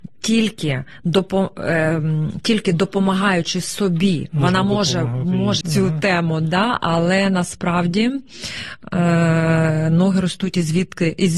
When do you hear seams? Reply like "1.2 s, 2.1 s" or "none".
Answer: 5.6 s